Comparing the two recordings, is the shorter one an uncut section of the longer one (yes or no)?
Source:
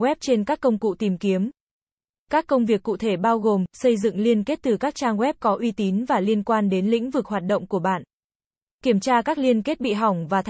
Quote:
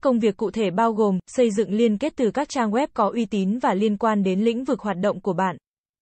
yes